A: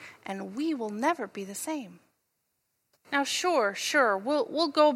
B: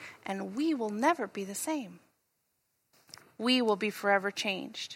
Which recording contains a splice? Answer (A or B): A